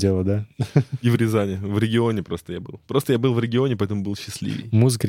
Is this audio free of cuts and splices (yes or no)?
yes